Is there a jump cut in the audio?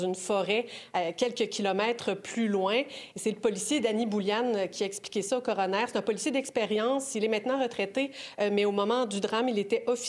no; 0 cuts

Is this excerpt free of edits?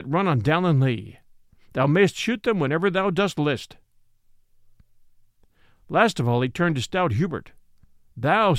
yes; 0 cuts

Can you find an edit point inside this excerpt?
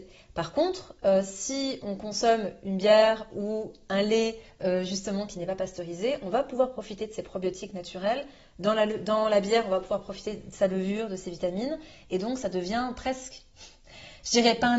no; 0 cuts

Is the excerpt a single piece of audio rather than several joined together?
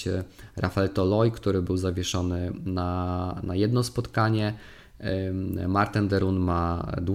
yes; 0 cuts

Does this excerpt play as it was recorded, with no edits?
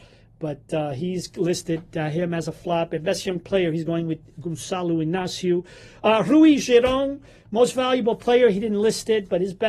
yes; 0 cuts

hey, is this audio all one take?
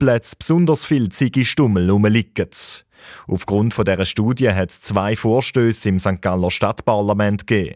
yes; 0 cuts

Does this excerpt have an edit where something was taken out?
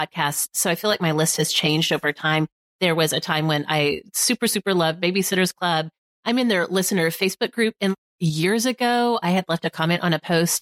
no; 0 cuts

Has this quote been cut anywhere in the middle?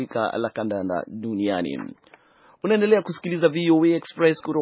no; 0 cuts

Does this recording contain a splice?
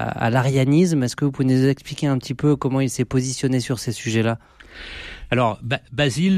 no; 0 cuts

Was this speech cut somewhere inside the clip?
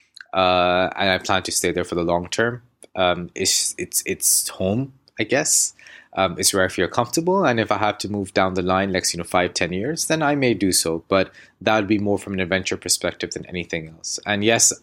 no; 0 cuts

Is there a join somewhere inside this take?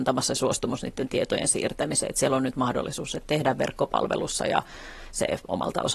no; 0 cuts

